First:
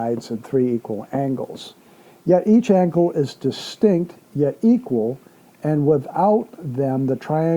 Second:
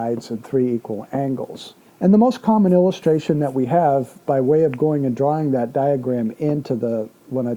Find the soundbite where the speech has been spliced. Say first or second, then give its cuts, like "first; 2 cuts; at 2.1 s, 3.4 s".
second; 1 cut; at 1.9 s